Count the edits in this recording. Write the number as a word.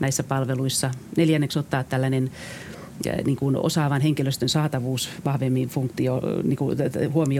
zero